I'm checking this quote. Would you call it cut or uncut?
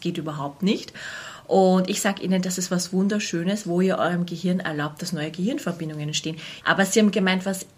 cut